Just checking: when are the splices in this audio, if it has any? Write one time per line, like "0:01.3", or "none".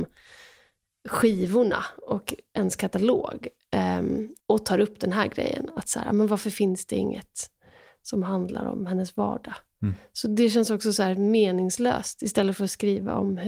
0:04.4